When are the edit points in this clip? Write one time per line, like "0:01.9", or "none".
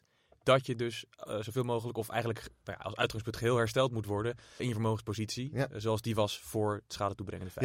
0:04.6